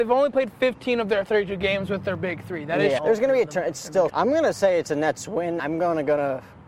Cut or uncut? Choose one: cut